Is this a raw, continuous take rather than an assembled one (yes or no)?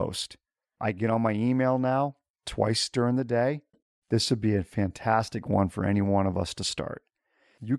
no